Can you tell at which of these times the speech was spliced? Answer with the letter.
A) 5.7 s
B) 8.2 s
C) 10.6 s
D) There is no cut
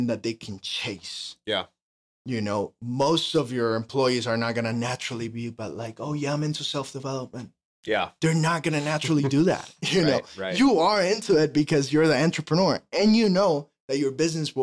D